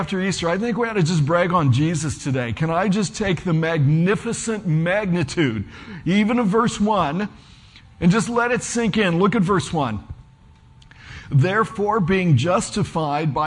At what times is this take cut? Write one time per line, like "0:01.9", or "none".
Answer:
none